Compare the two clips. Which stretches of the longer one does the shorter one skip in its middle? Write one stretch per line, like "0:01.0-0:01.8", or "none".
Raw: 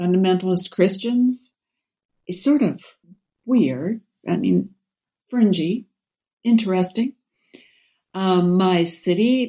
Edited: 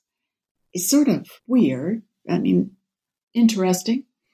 0:02.9-0:03.3
0:05.2-0:06.3